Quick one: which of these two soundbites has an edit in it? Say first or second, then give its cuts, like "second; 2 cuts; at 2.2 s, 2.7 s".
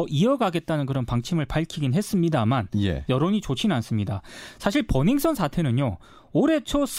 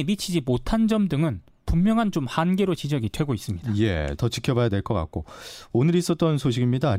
second; 1 cut; at 4.2 s